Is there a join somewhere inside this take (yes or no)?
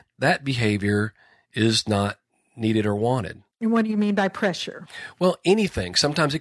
no